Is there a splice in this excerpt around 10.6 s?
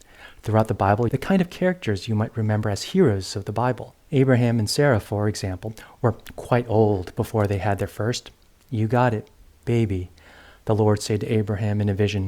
no; 2 cuts; at 1.1 s, 4.0 s

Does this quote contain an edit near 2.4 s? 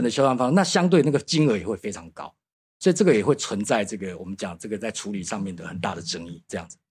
no; 0 cuts

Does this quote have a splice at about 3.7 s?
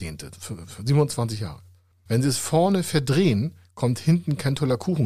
no; 1 cut; at 2.1 s

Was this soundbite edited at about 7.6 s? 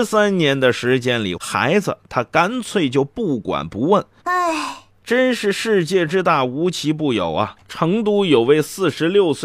yes; 3 cuts; at 1.4 s, 4.2 s, 7.6 s

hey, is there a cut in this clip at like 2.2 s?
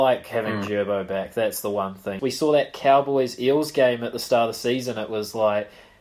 yes; 1 cut; at 2.2 s

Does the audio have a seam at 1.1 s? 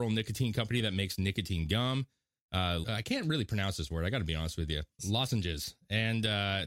no; 2 cuts; at 2.8 s, 5.0 s

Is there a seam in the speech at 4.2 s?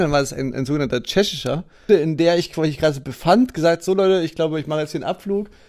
no; 1 cut; at 1.9 s

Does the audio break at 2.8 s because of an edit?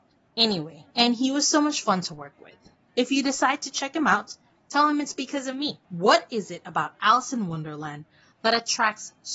no; 2 cuts; at 0.9 s, 5.8 s

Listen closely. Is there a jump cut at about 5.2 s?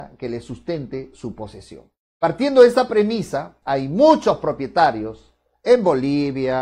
no; 2 cuts; at 2.0 s, 3.6 s

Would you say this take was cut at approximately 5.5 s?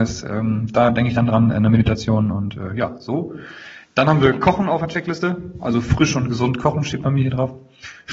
no; 0 cuts

